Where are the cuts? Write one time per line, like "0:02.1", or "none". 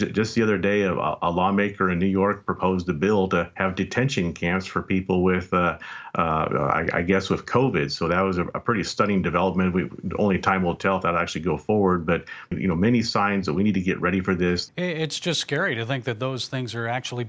0:12.5
0:14.7

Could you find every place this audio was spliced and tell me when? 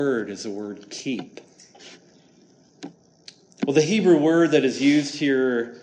0:03.5

